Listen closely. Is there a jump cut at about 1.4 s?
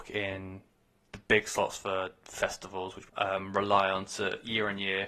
no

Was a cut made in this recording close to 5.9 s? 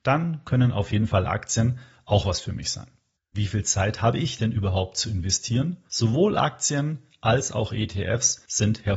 yes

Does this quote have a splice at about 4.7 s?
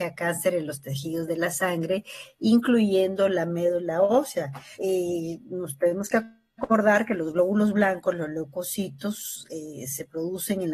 yes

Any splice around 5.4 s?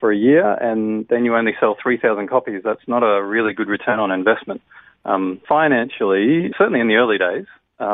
yes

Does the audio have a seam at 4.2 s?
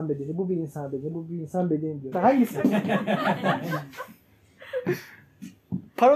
no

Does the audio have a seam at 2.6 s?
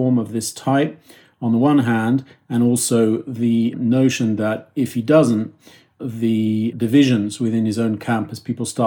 no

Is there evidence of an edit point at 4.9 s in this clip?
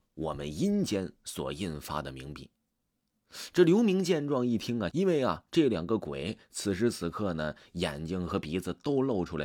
yes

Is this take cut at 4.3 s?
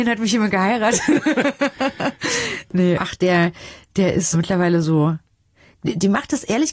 yes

